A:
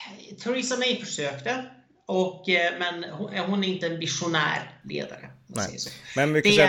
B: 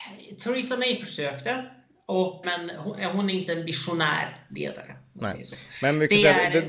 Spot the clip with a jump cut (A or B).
B